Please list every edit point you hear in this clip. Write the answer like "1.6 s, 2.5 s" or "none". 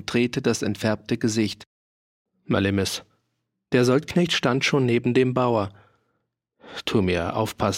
none